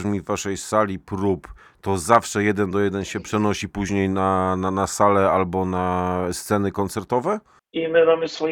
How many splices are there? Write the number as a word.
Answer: one